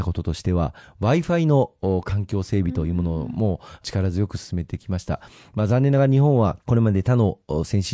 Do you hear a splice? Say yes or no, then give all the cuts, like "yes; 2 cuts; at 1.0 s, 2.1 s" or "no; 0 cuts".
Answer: yes; 1 cut; at 6.6 s